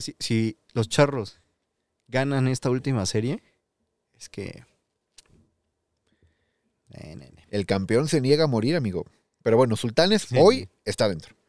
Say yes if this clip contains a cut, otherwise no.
no